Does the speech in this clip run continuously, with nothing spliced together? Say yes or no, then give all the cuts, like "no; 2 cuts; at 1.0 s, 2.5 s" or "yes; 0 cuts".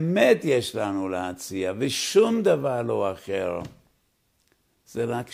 yes; 0 cuts